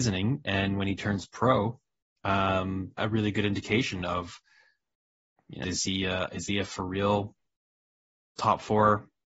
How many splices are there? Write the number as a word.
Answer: two